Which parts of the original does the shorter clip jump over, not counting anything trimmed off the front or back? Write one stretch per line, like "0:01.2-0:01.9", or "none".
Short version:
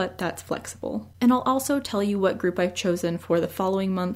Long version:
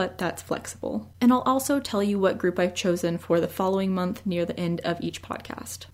none